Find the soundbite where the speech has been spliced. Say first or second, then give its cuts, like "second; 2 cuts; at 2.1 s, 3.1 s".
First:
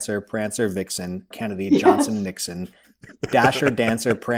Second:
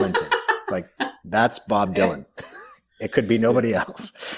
first; 1 cut; at 1.3 s